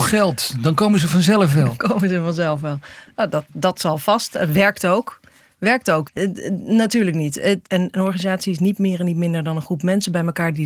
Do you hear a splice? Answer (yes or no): yes